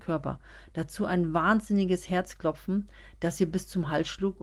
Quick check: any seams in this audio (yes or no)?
no